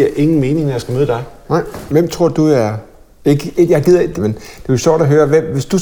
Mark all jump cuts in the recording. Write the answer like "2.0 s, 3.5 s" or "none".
1.9 s, 4.2 s